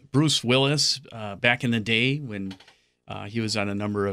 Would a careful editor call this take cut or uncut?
uncut